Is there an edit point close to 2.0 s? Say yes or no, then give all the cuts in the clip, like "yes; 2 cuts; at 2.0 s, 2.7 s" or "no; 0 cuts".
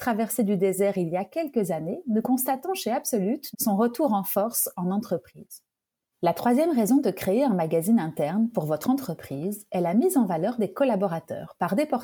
no; 2 cuts; at 3.5 s, 6.1 s